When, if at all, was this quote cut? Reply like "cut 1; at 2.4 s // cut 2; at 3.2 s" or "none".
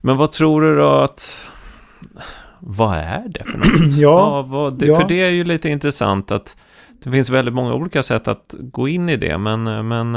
none